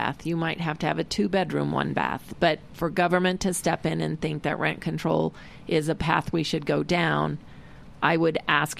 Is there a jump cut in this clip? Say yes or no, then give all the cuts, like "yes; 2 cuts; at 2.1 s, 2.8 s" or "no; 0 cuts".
yes; 1 cut; at 2.3 s